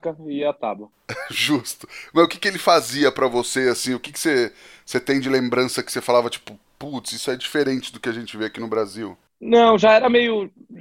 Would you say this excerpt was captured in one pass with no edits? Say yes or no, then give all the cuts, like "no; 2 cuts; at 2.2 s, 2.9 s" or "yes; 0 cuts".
yes; 0 cuts